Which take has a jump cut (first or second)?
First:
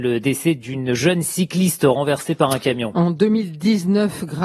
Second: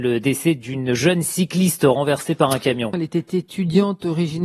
second